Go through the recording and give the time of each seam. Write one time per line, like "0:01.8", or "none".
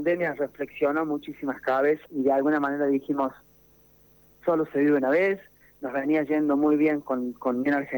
0:02.1